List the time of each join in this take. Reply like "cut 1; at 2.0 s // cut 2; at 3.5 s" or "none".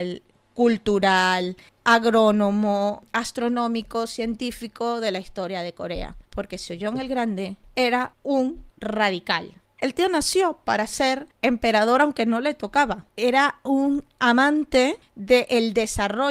none

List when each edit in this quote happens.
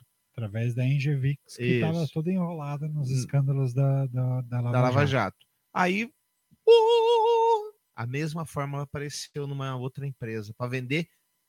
none

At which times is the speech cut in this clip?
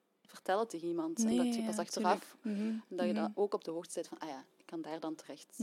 none

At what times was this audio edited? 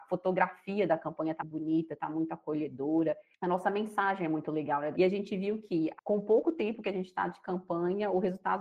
cut 1; at 1.4 s // cut 2; at 4.9 s // cut 3; at 6.0 s

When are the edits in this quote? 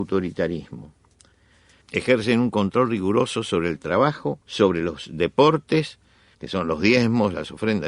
cut 1; at 1.8 s // cut 2; at 4.4 s // cut 3; at 6.3 s

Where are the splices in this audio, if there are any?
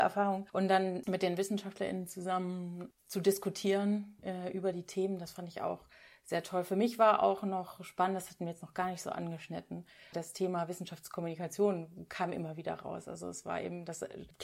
none

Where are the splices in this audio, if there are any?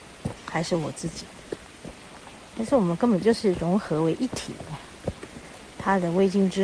none

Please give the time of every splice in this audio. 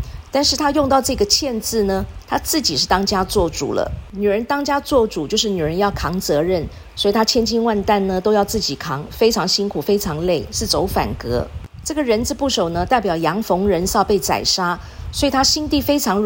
none

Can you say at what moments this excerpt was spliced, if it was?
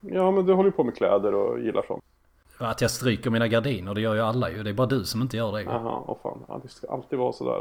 none

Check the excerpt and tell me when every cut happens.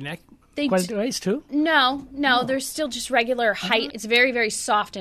cut 1; at 3.9 s

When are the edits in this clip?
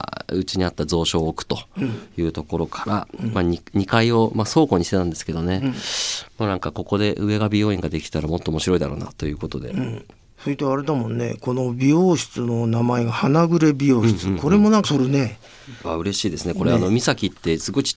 cut 1; at 14.8 s // cut 2; at 15.8 s

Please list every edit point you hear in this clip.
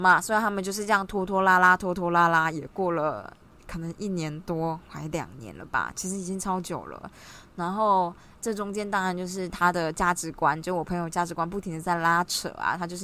none

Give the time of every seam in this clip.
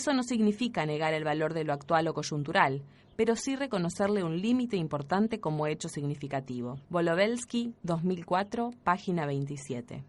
cut 1; at 6.8 s

